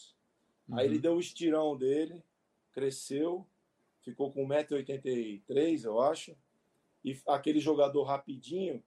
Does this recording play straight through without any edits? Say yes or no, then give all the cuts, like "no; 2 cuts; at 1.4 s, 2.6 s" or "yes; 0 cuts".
yes; 0 cuts